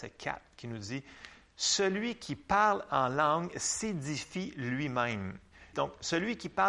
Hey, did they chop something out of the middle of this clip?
yes; 1 cut; at 5.7 s

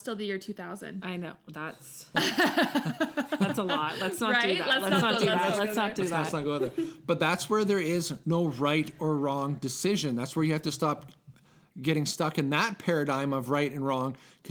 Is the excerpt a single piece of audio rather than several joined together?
yes; 0 cuts

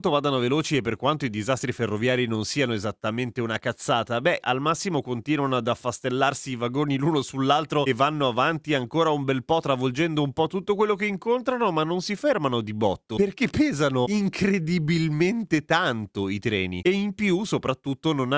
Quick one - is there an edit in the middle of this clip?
yes; 1 cut; at 4.4 s

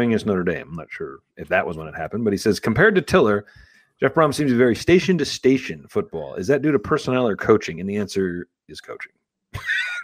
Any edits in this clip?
no; 0 cuts

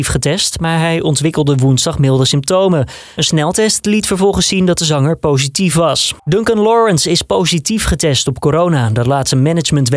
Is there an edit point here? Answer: yes; 1 cut; at 6.2 s

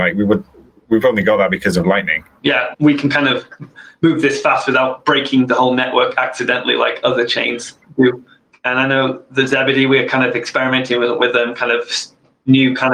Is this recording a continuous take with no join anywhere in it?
no; 1 cut; at 8.5 s

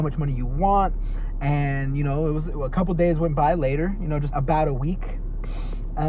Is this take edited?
yes; 1 cut; at 4.3 s

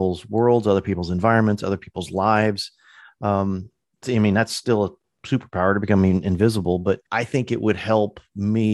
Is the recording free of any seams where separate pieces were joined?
no; 2 cuts; at 4.0 s, 7.1 s

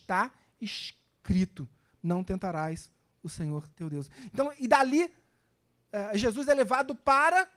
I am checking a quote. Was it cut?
yes; 2 cuts; at 3.7 s, 5.8 s

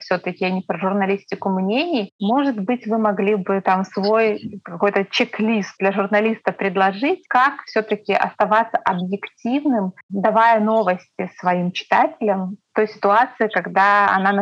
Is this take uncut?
no; 1 cut; at 7.2 s

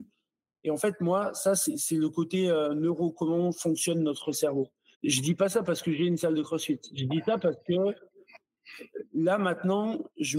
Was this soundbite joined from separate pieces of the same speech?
yes; 1 cut; at 4.9 s

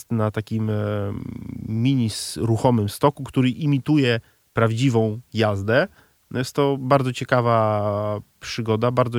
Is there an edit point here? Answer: no; 0 cuts

